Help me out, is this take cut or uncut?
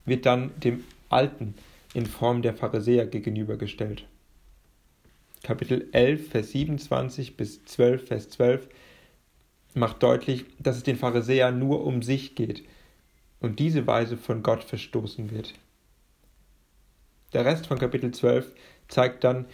uncut